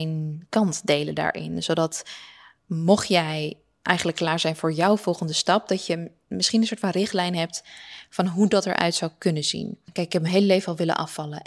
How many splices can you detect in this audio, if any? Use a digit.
0